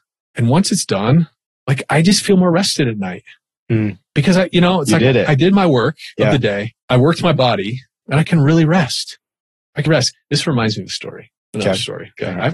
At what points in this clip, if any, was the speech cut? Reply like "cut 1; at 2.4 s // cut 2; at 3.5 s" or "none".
cut 1; at 6.8 s // cut 2; at 8.0 s // cut 3; at 9.9 s